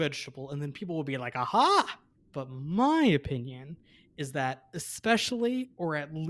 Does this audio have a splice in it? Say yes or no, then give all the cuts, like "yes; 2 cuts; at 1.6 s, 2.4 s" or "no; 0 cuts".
yes; 1 cut; at 2.1 s